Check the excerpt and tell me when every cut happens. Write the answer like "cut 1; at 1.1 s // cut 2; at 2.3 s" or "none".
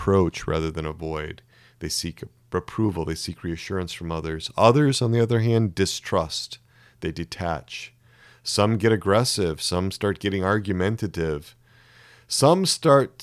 none